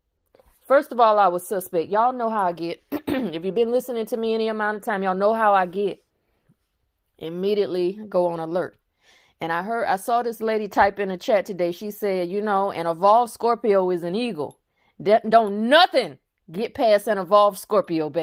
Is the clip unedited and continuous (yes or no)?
yes